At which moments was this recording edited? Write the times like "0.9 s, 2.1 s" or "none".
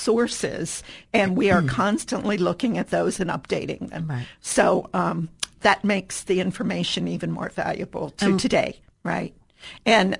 8.9 s

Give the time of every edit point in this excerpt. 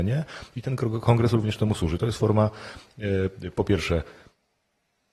none

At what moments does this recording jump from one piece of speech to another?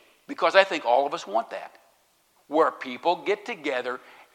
2.4 s

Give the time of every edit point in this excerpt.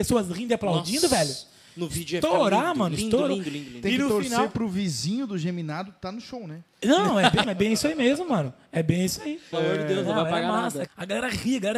7.4 s, 9.5 s, 10.9 s

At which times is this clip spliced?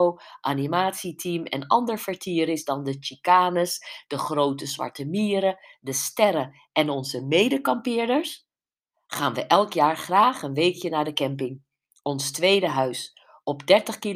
none

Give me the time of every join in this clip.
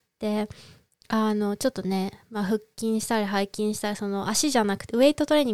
none

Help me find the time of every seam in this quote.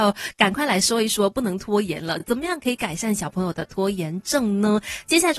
none

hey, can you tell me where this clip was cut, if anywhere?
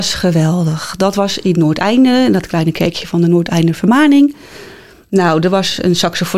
none

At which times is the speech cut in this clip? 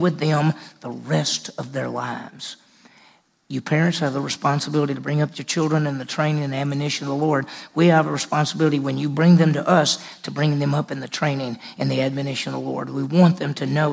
none

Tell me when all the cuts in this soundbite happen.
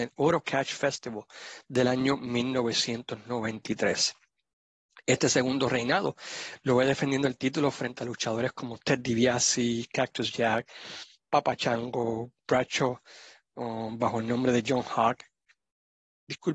none

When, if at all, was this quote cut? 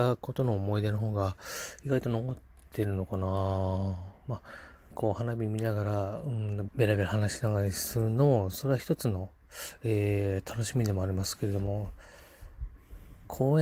4.9 s, 6.7 s

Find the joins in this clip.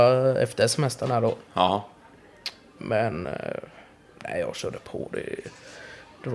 none

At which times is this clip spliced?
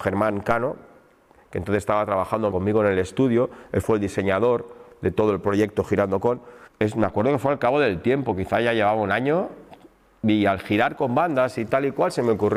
2.5 s, 6.7 s

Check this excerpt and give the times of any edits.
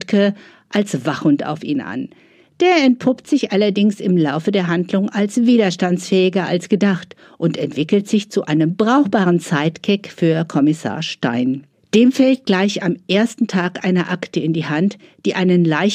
none

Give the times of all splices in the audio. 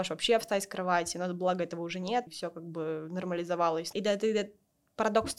2.3 s, 3.9 s

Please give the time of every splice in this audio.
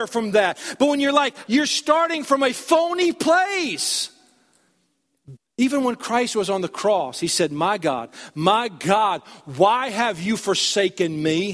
1.5 s, 5.4 s

